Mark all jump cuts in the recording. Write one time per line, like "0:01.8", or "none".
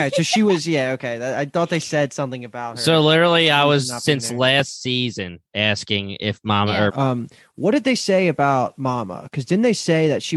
0:06.9